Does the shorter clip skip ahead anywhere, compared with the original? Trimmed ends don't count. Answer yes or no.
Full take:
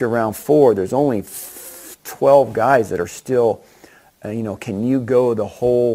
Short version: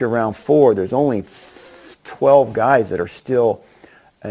no